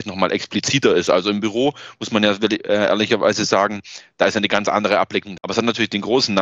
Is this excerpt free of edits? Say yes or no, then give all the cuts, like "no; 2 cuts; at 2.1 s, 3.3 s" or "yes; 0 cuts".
no; 1 cut; at 5.4 s